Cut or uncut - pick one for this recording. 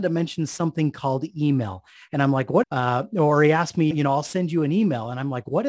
cut